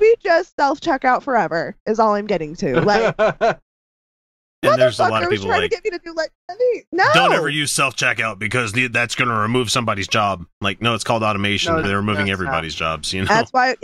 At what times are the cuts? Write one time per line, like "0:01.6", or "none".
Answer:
0:11.8